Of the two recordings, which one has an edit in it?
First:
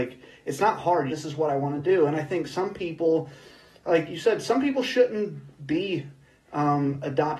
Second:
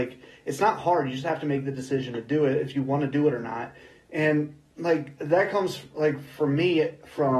first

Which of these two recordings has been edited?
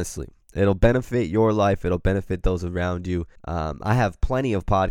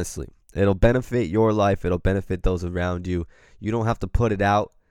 first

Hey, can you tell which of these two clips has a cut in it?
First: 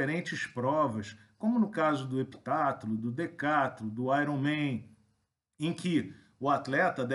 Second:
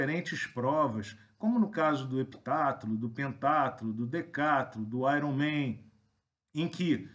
first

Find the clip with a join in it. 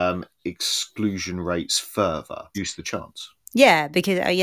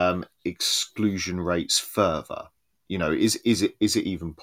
first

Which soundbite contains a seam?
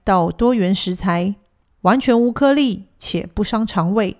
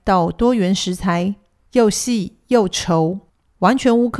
first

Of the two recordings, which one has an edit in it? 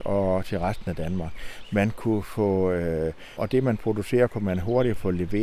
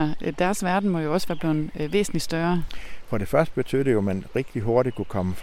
first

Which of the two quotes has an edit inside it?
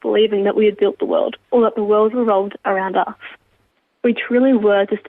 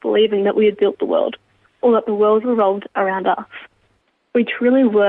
first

